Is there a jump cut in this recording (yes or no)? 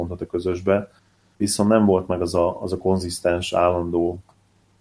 no